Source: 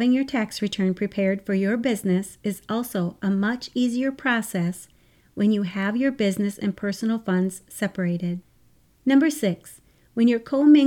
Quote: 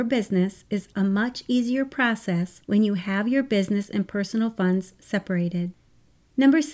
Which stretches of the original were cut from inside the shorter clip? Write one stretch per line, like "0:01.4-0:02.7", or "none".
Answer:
0:02.7-0:03.2
0:04.9-0:05.3